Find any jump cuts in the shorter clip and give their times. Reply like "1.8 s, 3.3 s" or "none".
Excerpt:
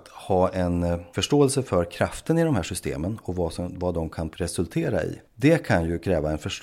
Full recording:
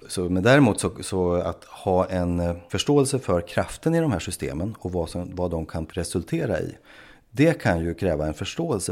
5.3 s